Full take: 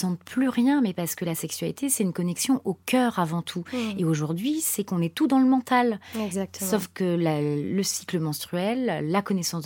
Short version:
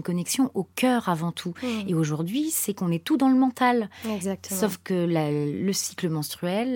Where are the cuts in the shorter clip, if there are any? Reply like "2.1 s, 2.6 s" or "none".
none